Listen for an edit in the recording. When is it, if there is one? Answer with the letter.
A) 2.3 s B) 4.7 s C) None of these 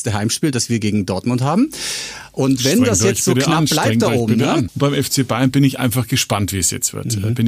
B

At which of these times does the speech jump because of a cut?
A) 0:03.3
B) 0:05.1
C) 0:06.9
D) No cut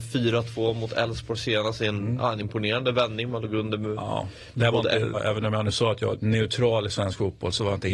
B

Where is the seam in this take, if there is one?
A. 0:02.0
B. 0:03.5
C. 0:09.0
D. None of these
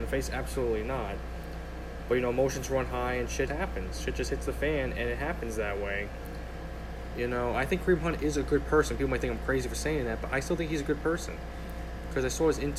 B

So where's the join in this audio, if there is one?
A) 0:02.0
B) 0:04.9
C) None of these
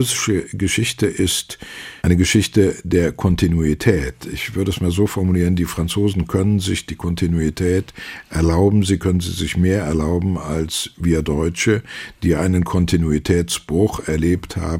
A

